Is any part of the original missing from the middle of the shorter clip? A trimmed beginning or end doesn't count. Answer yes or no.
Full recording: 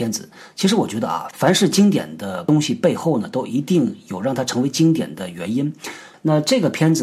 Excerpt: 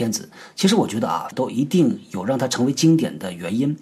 yes